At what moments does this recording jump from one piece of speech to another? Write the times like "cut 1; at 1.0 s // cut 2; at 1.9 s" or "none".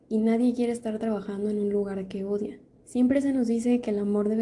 cut 1; at 2.8 s